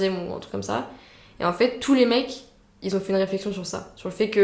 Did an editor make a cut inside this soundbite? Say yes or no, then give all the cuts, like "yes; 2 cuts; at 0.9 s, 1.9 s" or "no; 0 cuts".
no; 0 cuts